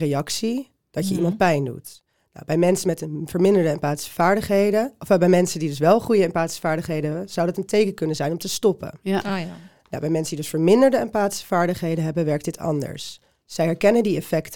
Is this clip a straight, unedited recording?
yes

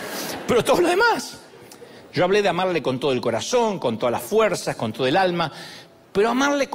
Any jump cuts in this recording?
yes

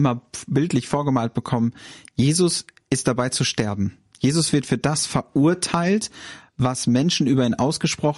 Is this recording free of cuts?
yes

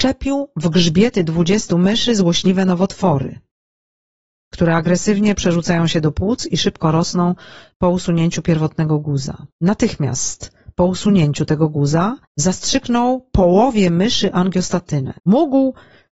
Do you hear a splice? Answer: yes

